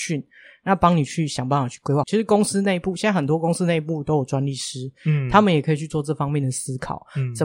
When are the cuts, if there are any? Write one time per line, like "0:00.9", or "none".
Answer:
0:02.0